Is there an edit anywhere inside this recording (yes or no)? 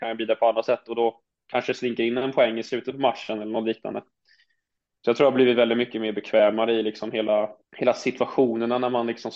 yes